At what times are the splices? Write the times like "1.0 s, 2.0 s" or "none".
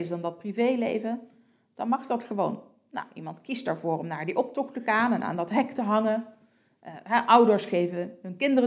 none